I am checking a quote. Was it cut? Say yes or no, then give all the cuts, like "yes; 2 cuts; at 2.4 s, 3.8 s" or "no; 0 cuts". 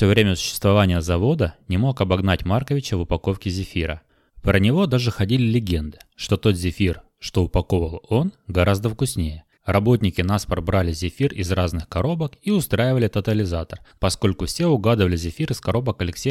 yes; 3 cuts; at 4.3 s, 9.6 s, 14.0 s